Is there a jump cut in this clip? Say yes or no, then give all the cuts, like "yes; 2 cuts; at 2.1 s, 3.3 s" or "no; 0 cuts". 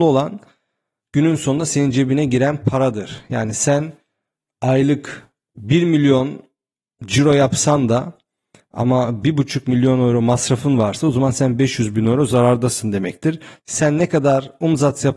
yes; 1 cut; at 13.6 s